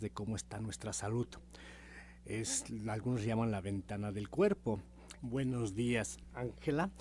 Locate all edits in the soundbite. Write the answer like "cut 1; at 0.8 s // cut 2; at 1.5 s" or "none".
cut 1; at 5.2 s